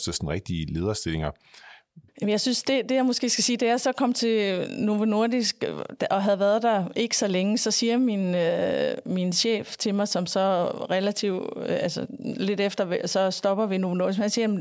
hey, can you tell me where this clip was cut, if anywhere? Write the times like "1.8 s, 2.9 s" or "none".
2.1 s